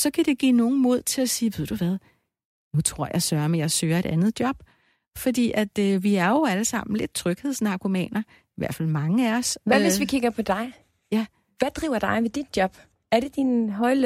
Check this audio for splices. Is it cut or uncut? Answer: uncut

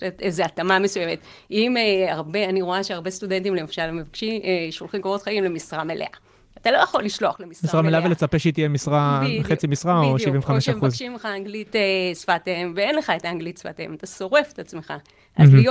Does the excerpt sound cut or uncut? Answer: uncut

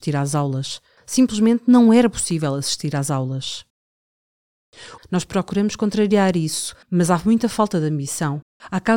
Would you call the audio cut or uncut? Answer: cut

